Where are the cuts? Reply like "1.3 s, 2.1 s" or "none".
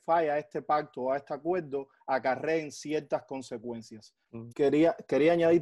4.5 s